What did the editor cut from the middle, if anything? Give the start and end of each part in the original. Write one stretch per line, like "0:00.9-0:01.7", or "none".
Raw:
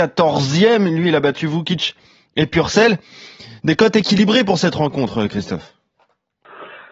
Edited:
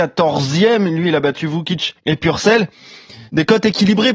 0:02.0-0:02.3